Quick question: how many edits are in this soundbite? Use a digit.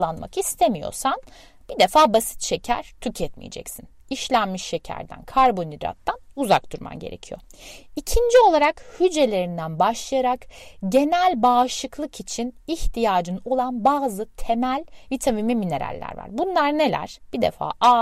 0